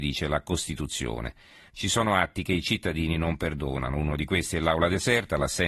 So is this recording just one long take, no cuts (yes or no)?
no